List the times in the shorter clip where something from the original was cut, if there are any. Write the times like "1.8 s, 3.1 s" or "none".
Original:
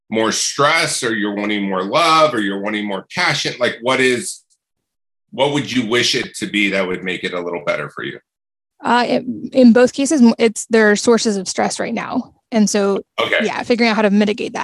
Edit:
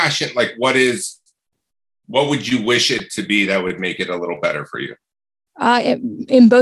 none

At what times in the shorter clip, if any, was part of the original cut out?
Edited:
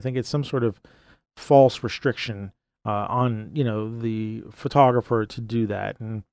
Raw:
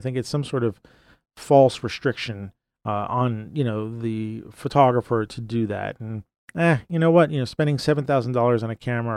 none

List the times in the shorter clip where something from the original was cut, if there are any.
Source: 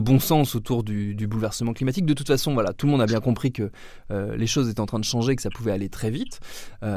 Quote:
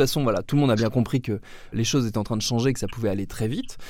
1.7 s

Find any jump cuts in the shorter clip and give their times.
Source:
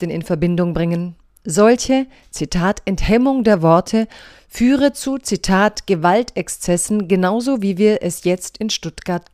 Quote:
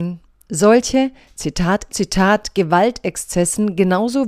1.9 s

